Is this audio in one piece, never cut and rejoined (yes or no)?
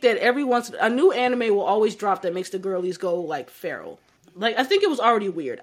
no